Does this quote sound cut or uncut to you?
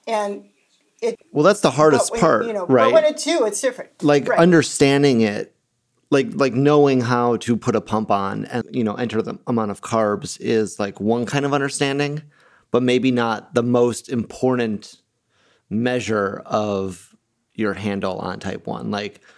cut